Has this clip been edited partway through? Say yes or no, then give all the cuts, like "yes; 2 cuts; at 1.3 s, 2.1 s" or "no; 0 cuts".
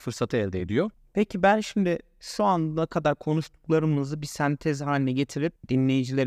no; 0 cuts